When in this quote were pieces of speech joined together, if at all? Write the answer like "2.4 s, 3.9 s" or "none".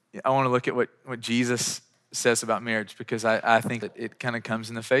3.8 s